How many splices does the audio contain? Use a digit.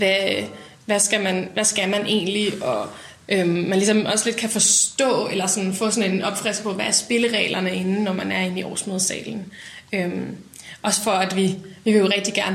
0